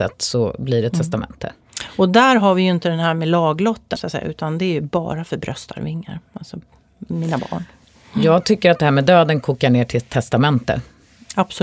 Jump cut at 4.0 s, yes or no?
yes